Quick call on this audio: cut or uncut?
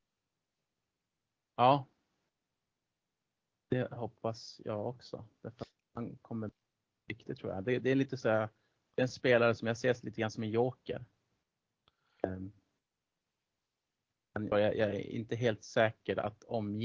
cut